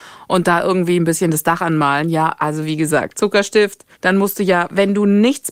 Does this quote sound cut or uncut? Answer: cut